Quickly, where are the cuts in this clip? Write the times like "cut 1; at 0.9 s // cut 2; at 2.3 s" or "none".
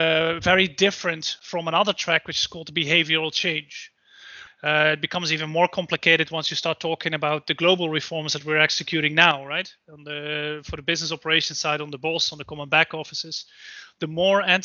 cut 1; at 4.5 s